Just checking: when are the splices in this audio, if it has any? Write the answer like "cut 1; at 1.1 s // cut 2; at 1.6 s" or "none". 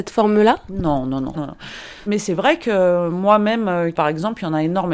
cut 1; at 1.3 s // cut 2; at 3.9 s